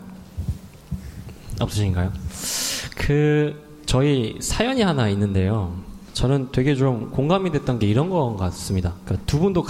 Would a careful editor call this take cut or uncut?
uncut